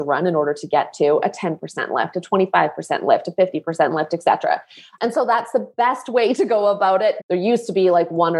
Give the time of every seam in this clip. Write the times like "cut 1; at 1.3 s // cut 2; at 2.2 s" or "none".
cut 1; at 7.2 s